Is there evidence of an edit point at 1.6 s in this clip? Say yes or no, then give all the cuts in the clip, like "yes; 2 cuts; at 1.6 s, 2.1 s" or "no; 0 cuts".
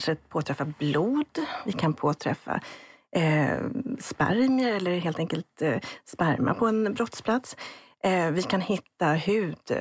yes; 1 cut; at 1.6 s